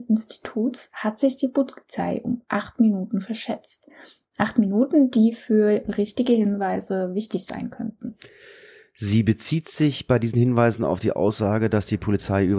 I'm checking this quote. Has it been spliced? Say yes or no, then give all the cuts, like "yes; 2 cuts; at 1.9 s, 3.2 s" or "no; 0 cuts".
no; 0 cuts